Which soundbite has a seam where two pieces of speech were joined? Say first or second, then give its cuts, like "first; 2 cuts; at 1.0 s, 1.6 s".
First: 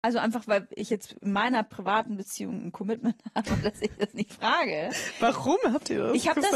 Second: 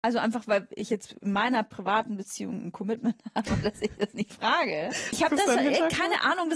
second; 1 cut; at 5.1 s